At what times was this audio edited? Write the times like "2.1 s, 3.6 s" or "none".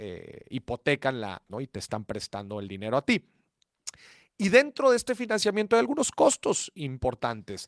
1.5 s